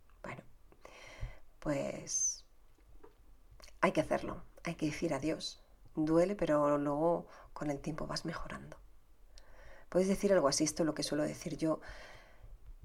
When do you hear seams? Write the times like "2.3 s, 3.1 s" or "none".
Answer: none